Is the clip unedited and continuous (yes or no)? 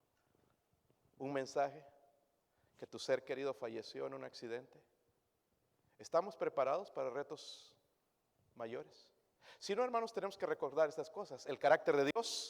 yes